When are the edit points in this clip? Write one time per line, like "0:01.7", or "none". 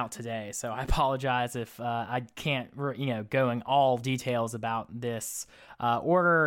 none